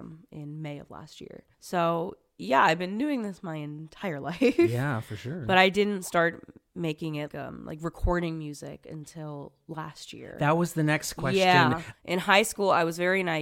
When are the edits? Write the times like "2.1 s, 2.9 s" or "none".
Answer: 1.5 s, 7.3 s, 11.9 s

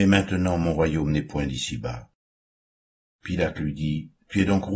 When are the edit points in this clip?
none

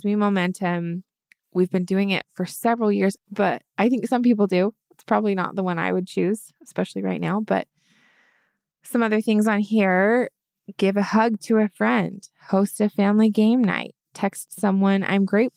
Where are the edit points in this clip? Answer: 3.2 s

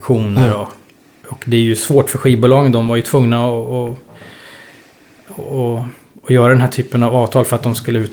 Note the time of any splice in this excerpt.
none

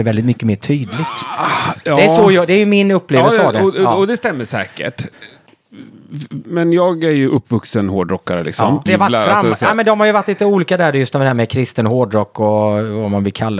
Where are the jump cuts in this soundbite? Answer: 8.9 s

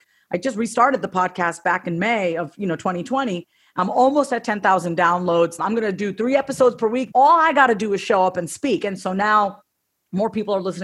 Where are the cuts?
5.6 s, 7.1 s

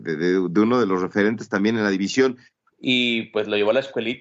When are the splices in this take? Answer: 2.7 s

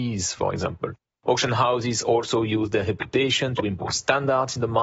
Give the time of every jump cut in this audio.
none

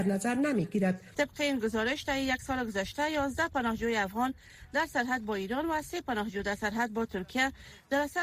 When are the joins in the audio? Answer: 1.1 s

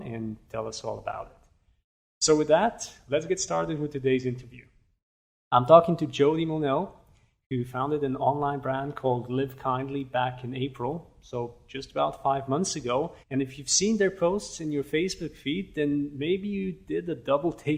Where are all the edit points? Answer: 13.2 s

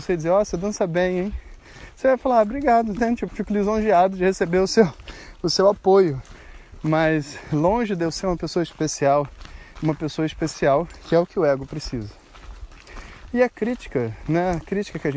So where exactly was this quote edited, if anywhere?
3.3 s, 9.8 s

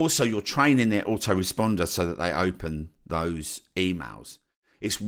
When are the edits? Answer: none

